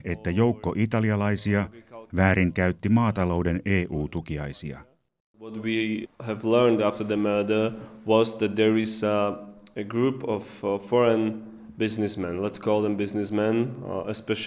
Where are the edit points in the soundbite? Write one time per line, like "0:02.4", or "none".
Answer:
0:02.1
0:05.2